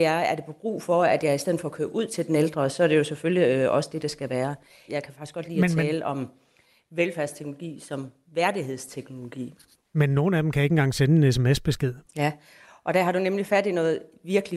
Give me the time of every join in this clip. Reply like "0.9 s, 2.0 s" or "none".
4.9 s, 12.0 s